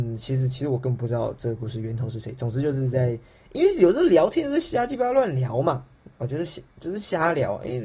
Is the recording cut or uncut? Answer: uncut